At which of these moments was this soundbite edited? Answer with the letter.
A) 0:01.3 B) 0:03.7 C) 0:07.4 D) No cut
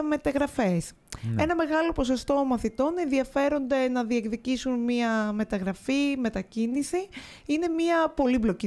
D